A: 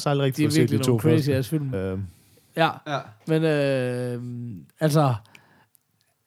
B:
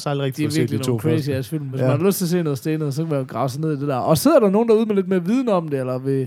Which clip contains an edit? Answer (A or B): A